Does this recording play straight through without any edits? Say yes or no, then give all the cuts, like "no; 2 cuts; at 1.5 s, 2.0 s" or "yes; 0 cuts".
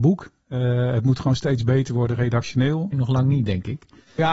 no; 1 cut; at 2.9 s